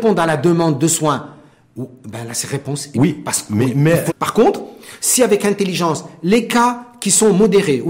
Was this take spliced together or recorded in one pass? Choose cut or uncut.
cut